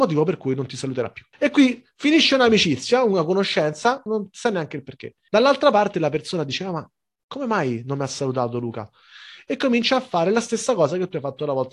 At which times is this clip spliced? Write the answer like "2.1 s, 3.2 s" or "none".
1.3 s, 4.1 s, 5.3 s